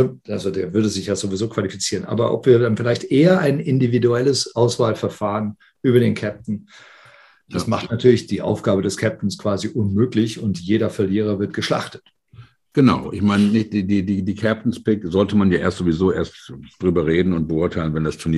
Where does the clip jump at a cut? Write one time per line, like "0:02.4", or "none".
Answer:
none